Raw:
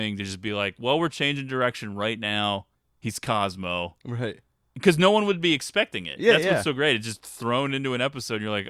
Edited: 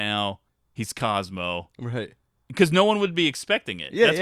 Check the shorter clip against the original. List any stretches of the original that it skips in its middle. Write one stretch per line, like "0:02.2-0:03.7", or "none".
none

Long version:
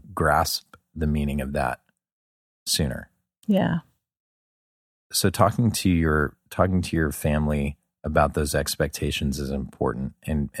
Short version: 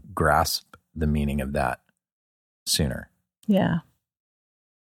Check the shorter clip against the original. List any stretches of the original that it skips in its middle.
none

